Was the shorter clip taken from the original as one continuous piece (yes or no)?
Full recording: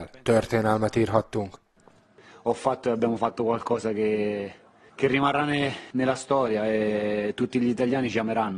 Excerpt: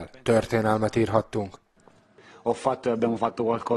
yes